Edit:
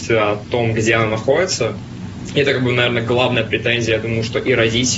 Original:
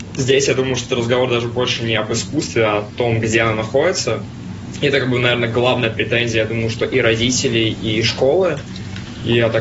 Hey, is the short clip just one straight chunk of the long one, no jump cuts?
yes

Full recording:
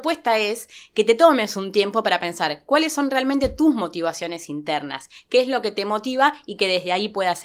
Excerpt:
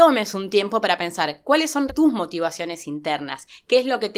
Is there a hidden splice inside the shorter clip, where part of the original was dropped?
yes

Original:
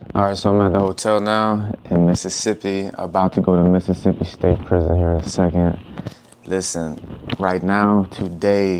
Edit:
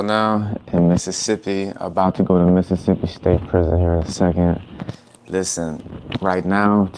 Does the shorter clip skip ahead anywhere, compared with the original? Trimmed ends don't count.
no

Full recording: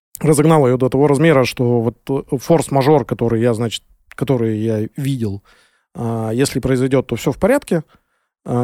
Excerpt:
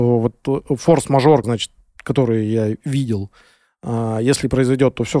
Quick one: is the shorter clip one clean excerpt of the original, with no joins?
no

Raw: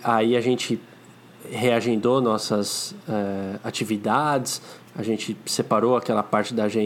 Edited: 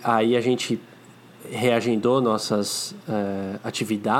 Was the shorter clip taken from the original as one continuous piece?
yes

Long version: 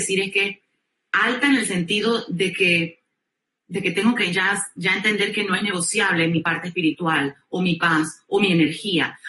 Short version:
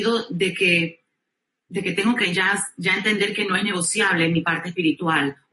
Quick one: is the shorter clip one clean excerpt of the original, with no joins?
yes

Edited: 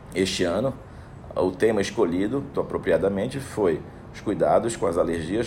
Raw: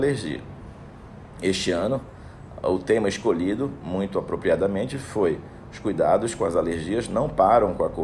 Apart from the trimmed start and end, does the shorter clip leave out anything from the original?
yes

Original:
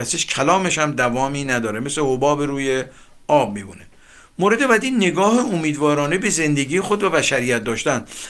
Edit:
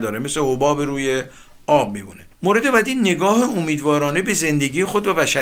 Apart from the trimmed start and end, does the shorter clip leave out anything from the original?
yes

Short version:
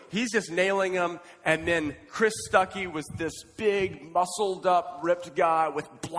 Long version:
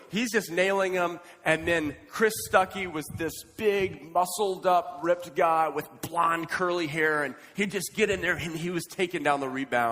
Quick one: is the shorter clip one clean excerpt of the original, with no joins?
yes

